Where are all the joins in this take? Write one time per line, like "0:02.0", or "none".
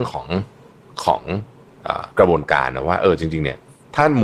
0:02.1